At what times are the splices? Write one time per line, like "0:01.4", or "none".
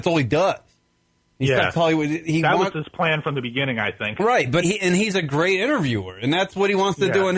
0:04.6